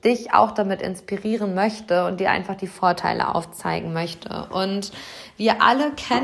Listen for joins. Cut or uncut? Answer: uncut